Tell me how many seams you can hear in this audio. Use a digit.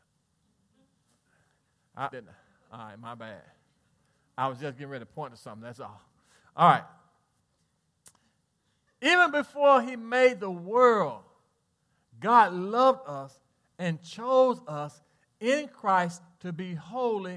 1